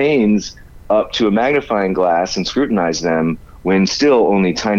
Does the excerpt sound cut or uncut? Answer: uncut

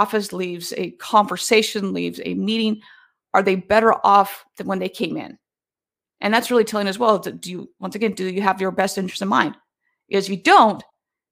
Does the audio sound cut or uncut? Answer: uncut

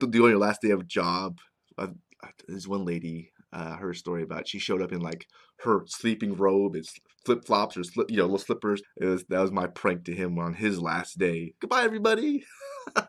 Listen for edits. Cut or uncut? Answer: cut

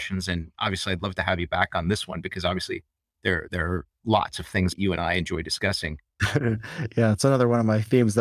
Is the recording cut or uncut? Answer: cut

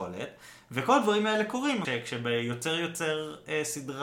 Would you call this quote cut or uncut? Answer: cut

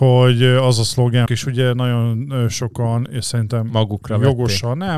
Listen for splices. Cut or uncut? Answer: cut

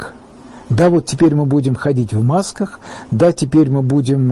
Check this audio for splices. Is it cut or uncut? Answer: uncut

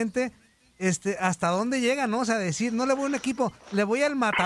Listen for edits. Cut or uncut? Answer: uncut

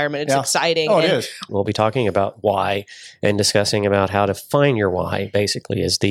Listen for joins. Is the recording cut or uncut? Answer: cut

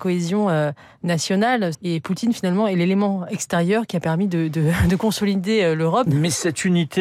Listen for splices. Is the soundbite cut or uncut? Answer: cut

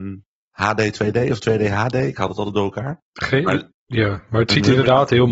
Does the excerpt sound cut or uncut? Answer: uncut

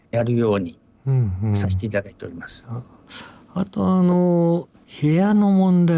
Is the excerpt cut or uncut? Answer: cut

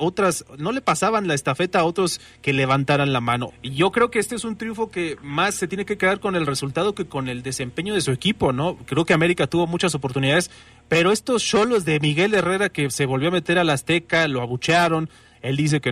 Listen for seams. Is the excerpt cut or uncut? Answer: cut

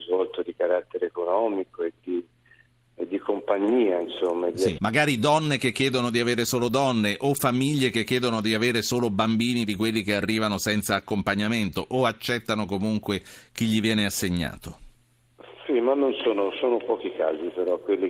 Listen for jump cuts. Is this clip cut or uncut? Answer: cut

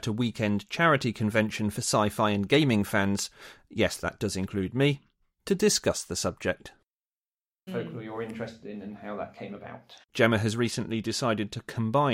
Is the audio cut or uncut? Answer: cut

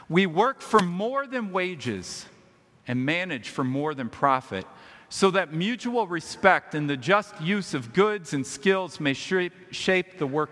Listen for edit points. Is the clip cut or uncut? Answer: uncut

